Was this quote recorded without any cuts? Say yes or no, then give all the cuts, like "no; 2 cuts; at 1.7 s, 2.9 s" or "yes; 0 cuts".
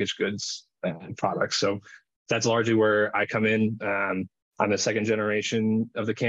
yes; 0 cuts